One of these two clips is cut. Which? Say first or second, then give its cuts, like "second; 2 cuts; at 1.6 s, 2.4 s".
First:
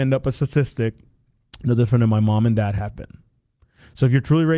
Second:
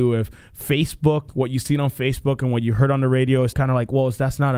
second; 1 cut; at 3.5 s